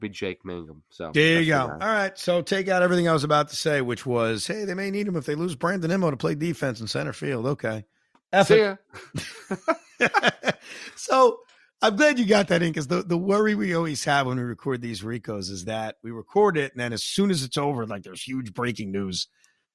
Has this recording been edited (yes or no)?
no